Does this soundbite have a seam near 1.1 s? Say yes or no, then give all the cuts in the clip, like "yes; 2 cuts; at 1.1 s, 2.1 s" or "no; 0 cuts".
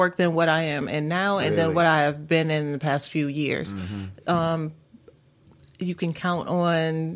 no; 0 cuts